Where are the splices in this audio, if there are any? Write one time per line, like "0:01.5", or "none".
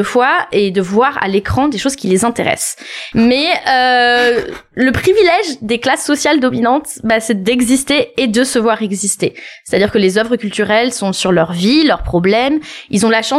0:03.1